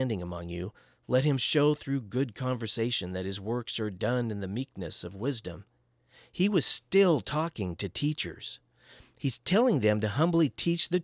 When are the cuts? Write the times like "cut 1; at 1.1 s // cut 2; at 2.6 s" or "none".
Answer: none